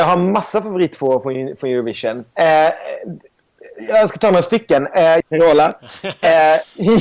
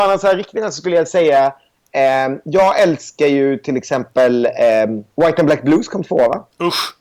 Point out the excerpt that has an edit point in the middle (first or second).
first